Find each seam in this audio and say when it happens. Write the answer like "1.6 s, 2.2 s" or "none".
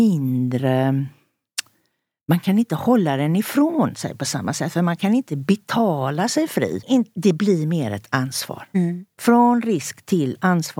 6.8 s